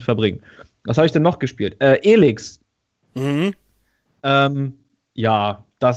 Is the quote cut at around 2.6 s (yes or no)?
no